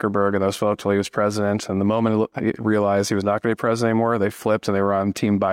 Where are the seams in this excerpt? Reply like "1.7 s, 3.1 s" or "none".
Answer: none